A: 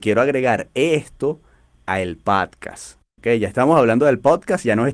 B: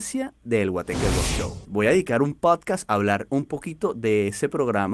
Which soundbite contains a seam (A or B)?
B